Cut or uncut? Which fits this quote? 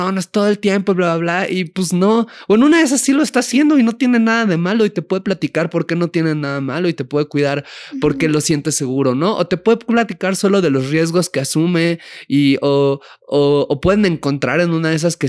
uncut